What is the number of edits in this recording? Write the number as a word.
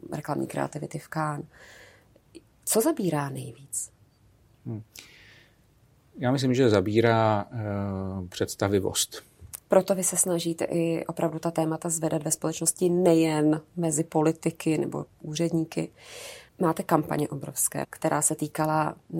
three